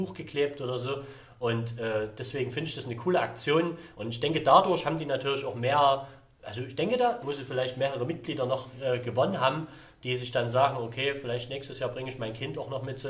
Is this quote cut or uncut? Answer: cut